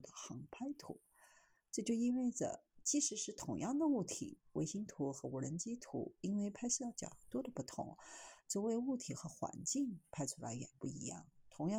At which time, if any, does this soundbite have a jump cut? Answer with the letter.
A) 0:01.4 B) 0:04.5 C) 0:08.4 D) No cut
C